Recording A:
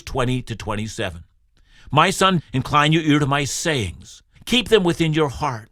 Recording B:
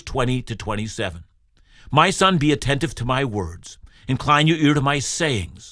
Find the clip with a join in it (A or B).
A